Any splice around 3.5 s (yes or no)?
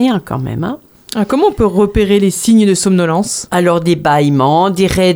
no